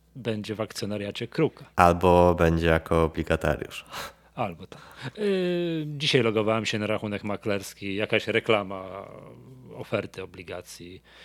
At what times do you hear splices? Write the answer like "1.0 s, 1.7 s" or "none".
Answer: 1.7 s